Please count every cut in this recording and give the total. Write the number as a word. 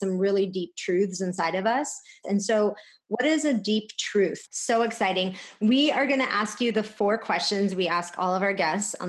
two